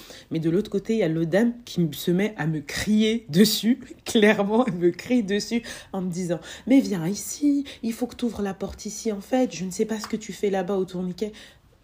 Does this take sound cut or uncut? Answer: uncut